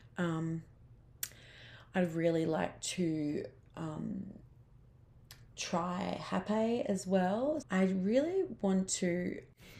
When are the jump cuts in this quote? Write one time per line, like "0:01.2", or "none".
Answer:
0:07.6

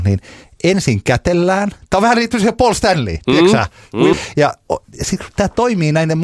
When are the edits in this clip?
0:04.1

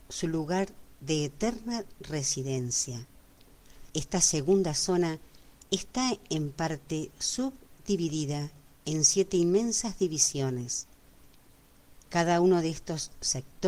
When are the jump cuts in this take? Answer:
0:03.9
0:12.0

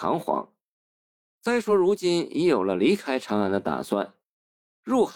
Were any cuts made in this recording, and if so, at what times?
none

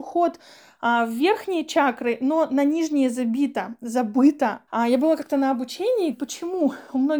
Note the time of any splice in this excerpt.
0:04.7
0:06.1

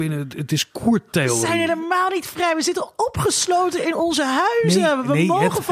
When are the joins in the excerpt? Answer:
none

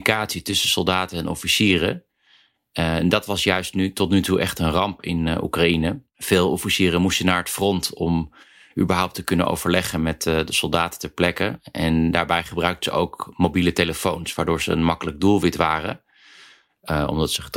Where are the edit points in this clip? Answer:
none

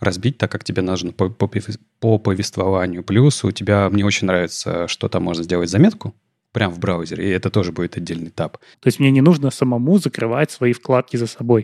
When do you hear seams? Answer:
0:08.7

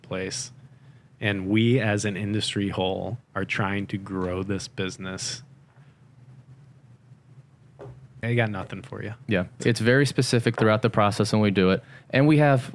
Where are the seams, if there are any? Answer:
0:08.2
0:09.6

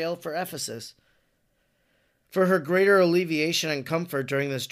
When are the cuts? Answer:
0:02.2

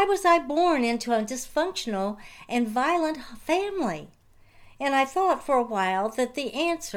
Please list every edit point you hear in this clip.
none

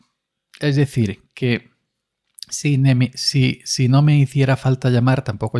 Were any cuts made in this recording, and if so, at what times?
none

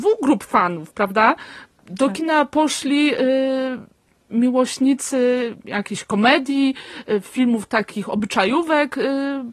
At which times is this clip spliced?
none

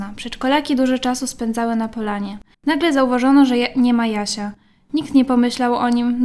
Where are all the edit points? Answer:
0:02.5

